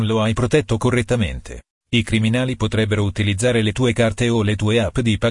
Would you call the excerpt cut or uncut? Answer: uncut